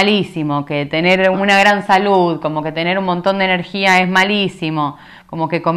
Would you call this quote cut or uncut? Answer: cut